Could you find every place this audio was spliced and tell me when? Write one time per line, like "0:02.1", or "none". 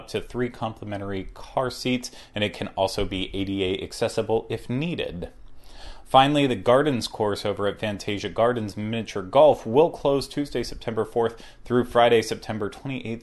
none